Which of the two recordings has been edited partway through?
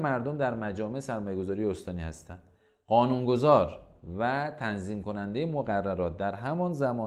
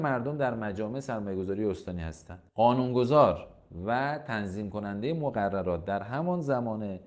second; 1 cut; at 2.5 s

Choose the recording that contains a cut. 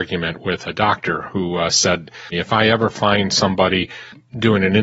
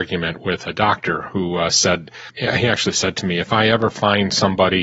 first; 1 cut; at 2.3 s

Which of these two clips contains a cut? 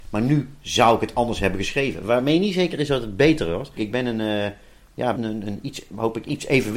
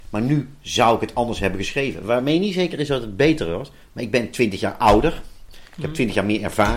first; 2 cuts; at 3.8 s, 5.2 s

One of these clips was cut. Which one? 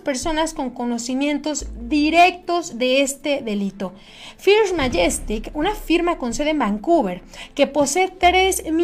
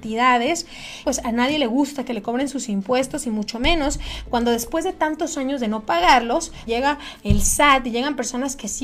second; 2 cuts; at 1.0 s, 6.7 s

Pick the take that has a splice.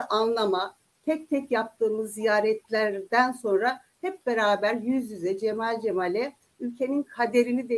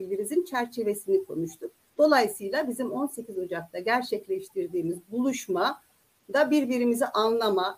second; 1 cut; at 1.9 s

